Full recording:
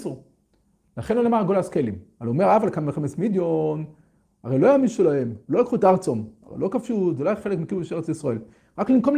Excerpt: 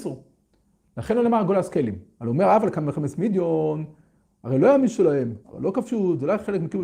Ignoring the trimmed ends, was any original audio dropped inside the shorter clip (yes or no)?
yes